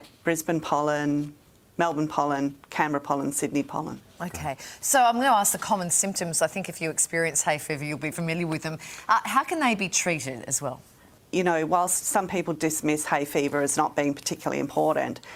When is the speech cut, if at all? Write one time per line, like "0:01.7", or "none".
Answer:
0:08.1
0:11.2